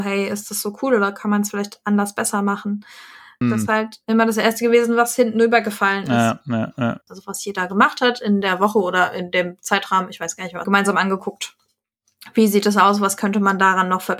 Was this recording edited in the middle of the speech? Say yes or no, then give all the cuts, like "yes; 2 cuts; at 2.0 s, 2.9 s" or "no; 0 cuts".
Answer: yes; 3 cuts; at 3.4 s, 7.1 s, 10.6 s